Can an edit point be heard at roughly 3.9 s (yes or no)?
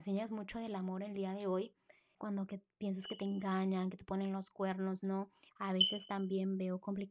no